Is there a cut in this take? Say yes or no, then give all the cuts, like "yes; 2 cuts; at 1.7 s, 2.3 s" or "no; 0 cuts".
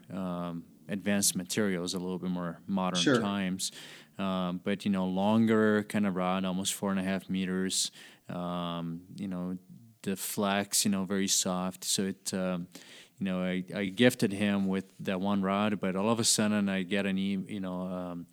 no; 0 cuts